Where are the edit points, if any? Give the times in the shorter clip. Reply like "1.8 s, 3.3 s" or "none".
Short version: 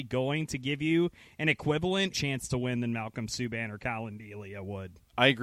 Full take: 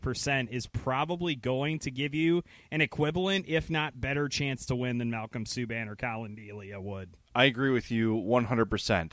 2.1 s